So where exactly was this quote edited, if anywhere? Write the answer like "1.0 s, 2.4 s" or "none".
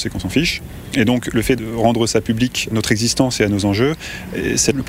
2.7 s